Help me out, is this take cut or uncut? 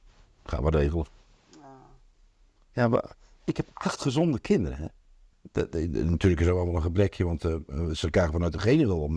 cut